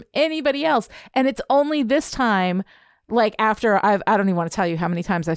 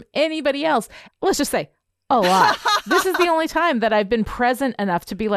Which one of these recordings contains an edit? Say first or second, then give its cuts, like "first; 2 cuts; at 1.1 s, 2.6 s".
second; 1 cut; at 1.1 s